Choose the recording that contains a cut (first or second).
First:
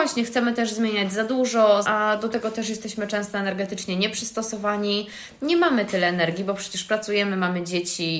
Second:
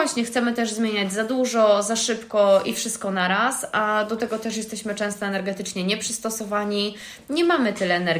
first